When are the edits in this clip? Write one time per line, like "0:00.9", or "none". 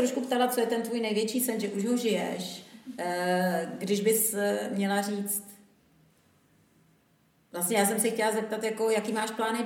none